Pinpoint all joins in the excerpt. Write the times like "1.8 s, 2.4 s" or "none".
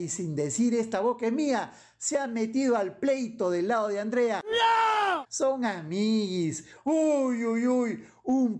6.8 s